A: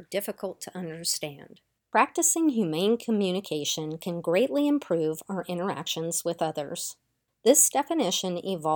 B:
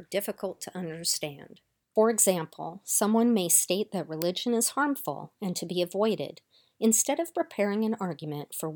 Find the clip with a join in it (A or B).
A